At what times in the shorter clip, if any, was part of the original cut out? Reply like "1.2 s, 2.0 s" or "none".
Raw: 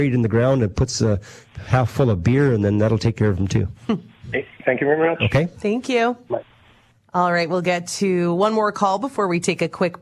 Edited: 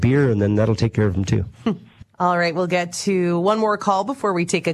2.0 s